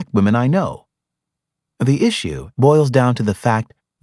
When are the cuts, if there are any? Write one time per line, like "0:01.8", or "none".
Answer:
0:02.5